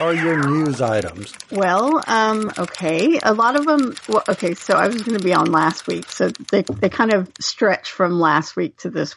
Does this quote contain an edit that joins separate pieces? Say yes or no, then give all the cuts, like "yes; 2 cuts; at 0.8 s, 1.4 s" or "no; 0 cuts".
no; 0 cuts